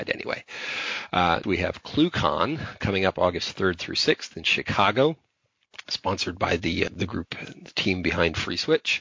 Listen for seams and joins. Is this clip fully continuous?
no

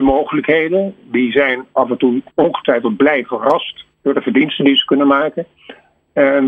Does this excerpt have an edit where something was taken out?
yes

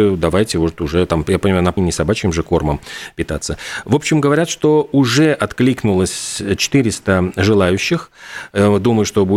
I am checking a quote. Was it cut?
yes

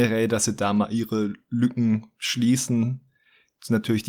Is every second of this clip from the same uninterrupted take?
yes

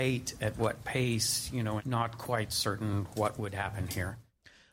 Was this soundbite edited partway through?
yes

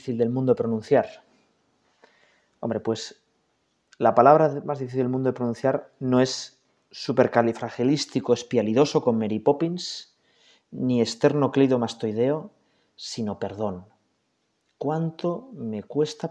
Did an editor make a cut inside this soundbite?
no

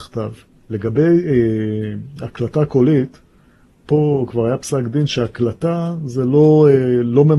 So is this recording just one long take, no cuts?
yes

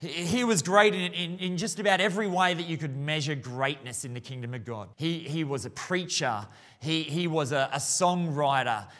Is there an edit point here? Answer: yes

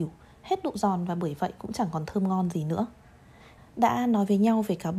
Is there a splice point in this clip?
yes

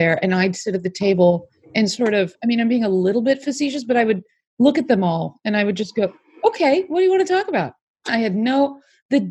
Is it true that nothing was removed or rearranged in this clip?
no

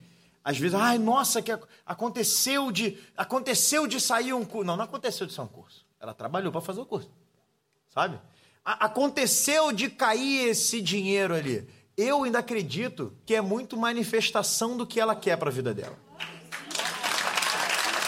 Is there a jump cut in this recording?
no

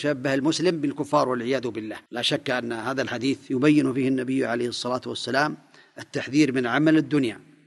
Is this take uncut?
no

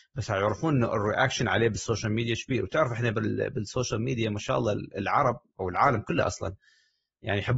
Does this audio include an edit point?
no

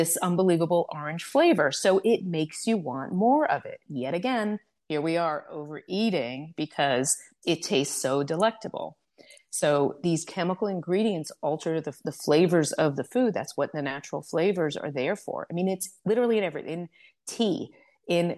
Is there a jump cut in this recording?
no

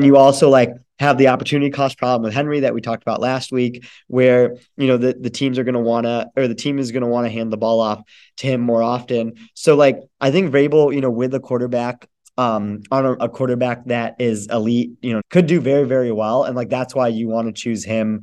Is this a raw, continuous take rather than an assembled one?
no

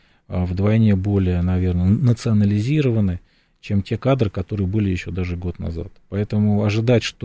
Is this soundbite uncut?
yes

